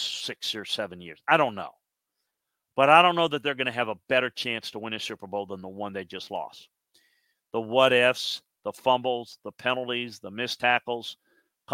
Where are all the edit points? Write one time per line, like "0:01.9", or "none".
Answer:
none